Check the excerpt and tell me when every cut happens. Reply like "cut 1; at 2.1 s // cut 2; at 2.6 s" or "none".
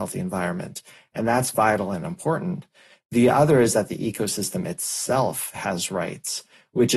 none

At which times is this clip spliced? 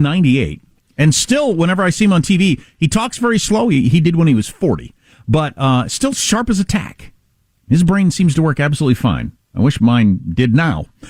none

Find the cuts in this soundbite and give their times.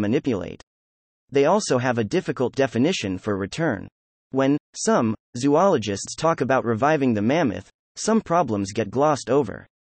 cut 1; at 1.1 s

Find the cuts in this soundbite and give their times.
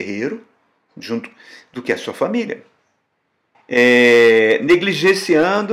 cut 1; at 3.5 s

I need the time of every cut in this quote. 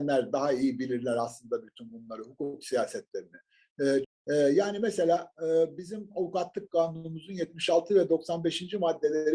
cut 1; at 4.0 s

